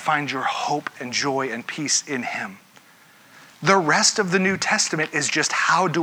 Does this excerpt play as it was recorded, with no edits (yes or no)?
yes